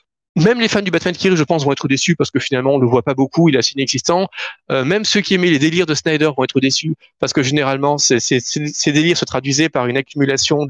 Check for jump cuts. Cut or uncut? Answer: uncut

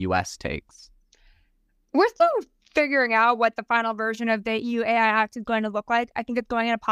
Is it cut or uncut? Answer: uncut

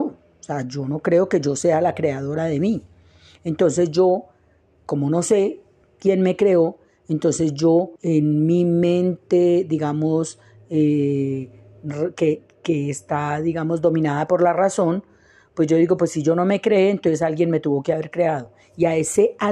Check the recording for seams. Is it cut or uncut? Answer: cut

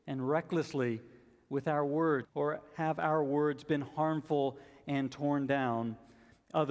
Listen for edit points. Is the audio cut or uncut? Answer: cut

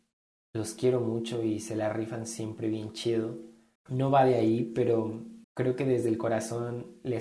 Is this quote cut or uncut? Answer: cut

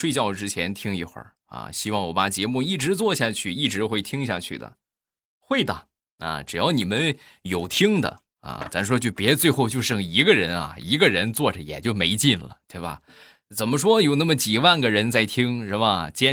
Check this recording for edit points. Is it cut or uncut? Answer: uncut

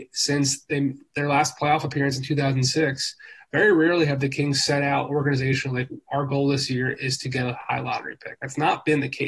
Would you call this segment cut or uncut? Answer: uncut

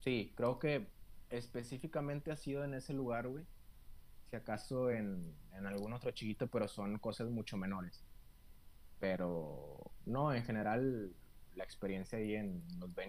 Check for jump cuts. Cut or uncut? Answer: uncut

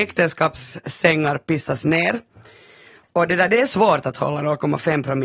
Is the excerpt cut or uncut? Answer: uncut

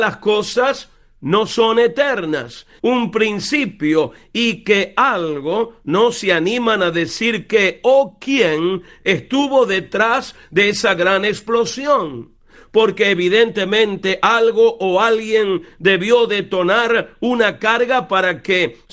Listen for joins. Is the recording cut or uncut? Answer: cut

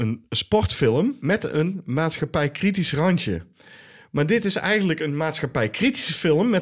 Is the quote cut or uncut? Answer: uncut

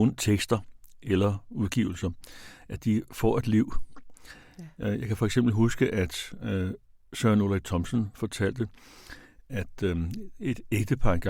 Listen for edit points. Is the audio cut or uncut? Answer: uncut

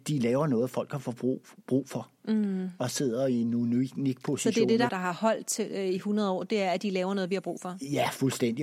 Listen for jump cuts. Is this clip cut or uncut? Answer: cut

